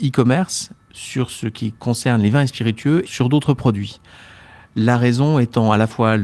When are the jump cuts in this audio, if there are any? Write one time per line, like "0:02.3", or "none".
0:03.1